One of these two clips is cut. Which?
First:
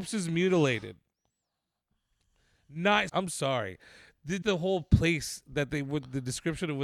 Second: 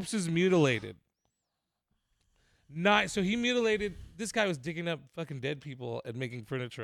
first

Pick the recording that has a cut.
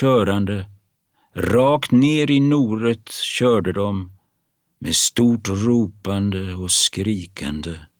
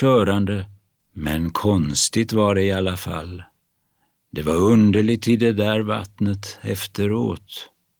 second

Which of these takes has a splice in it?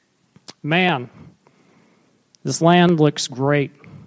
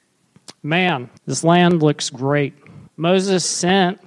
second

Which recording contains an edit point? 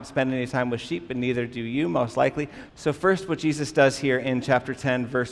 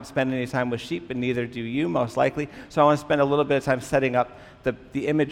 first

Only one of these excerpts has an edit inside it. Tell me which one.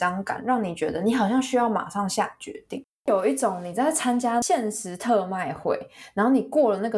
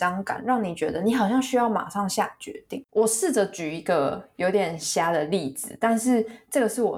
second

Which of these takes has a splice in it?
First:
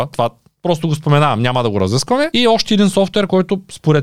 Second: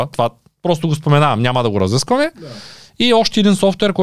first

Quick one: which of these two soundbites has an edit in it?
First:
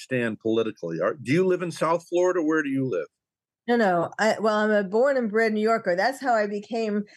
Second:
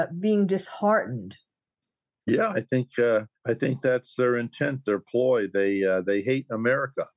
second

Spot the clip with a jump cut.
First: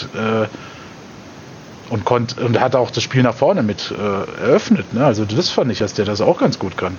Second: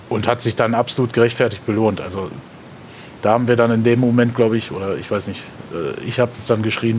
first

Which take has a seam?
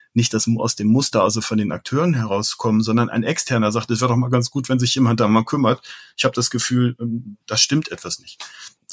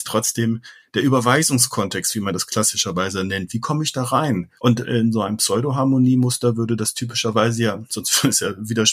second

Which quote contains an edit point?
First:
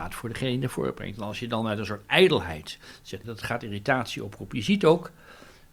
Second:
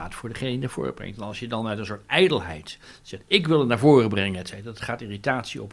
first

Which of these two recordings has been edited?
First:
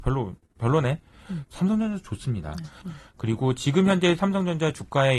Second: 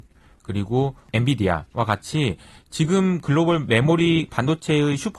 first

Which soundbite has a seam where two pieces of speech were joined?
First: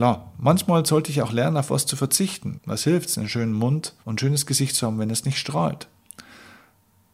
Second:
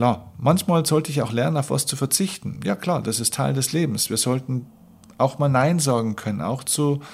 first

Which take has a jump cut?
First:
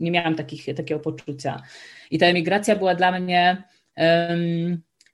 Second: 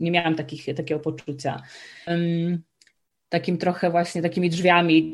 second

